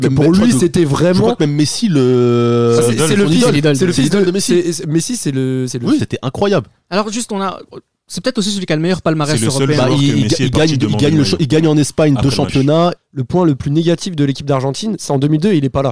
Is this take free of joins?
no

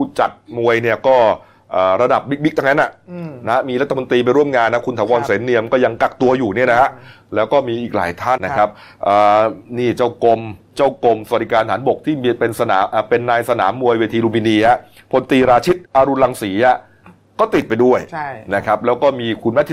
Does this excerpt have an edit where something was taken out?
yes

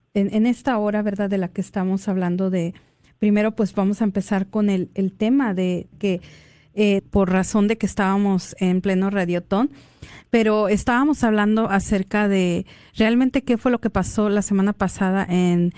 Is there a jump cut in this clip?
yes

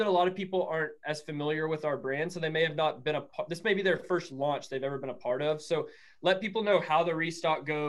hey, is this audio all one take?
yes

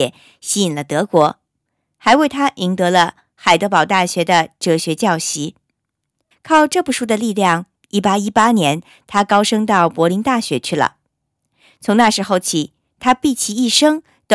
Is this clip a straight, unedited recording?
no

